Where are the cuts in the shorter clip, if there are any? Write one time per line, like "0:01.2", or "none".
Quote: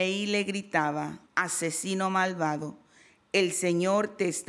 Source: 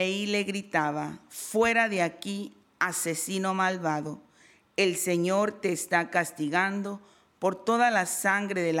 0:01.3